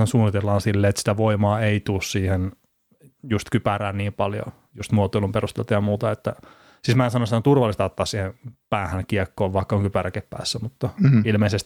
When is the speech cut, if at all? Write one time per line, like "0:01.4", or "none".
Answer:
none